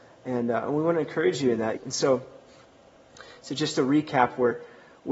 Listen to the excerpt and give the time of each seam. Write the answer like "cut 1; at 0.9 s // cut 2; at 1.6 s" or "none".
cut 1; at 1.8 s